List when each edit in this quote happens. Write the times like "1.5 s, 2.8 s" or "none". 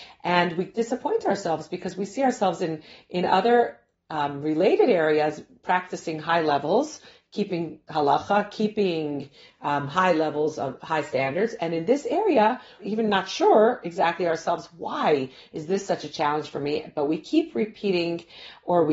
12.8 s